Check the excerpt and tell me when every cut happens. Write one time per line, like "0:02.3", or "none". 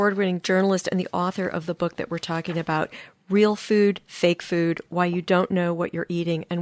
none

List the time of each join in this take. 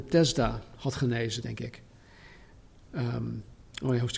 0:01.4

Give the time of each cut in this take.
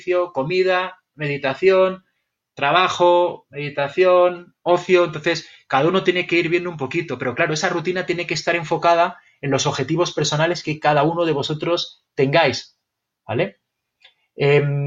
none

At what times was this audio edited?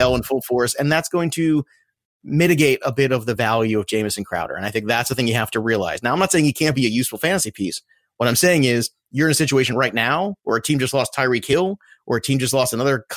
none

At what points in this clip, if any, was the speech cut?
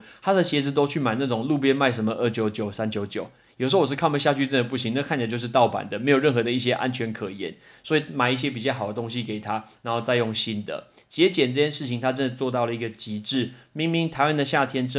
0:09.8

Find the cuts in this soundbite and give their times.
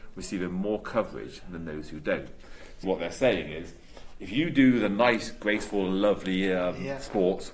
0:02.8

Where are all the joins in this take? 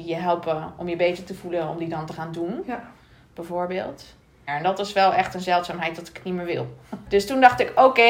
0:04.5
0:07.1

